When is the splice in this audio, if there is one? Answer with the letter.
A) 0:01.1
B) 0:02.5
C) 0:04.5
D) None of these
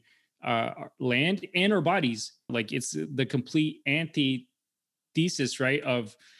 B